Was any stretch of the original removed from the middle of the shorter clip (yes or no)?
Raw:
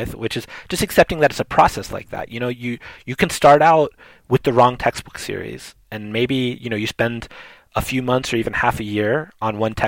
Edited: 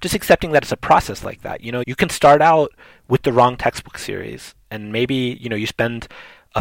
yes